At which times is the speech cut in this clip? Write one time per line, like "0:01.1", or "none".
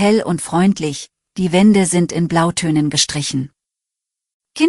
none